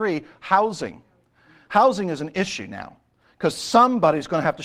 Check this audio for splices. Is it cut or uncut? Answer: uncut